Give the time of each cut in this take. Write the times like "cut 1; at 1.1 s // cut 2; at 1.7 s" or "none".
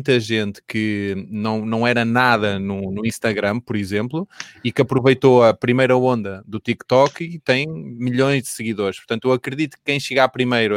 none